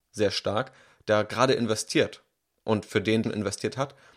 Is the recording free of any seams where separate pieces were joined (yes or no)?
no